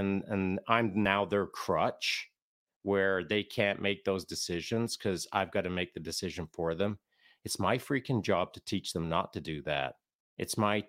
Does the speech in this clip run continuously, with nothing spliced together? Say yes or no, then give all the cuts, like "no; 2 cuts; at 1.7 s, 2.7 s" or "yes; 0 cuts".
yes; 0 cuts